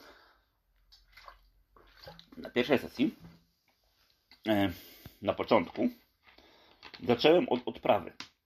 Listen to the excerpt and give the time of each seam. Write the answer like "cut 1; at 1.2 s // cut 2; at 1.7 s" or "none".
none